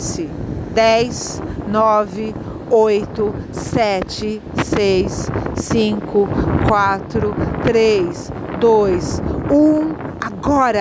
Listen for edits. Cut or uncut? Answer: uncut